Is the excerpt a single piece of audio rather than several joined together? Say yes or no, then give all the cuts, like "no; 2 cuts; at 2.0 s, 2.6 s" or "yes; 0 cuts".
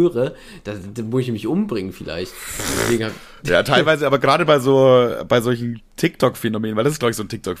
yes; 0 cuts